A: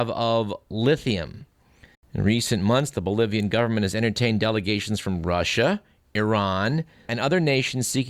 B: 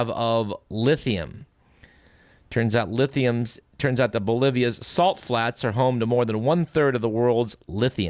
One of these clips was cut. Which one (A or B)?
A